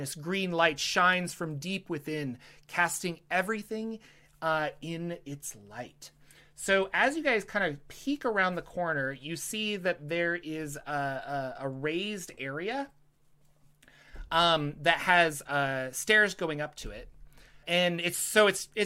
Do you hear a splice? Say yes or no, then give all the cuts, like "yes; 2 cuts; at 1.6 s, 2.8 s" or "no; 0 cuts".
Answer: yes; 1 cut; at 17.6 s